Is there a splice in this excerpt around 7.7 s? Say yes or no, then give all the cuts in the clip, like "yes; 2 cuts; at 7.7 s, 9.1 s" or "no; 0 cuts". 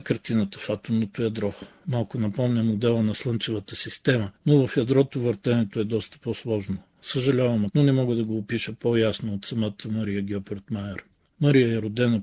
yes; 1 cut; at 7.7 s